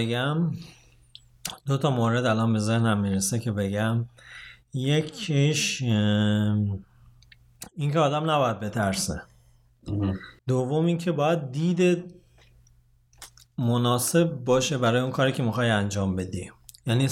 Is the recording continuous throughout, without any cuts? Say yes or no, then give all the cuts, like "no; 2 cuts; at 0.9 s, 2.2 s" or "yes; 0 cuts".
no; 1 cut; at 10.4 s